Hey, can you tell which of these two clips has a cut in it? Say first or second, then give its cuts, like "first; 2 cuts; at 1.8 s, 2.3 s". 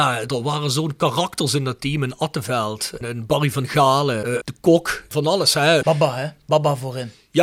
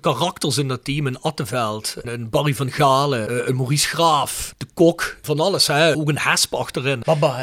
first; 2 cuts; at 4.4 s, 5.8 s